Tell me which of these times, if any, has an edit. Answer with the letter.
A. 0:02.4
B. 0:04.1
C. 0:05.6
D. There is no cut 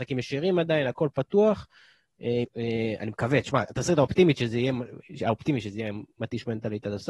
A